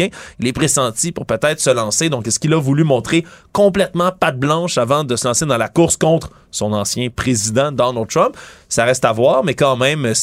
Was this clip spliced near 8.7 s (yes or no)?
no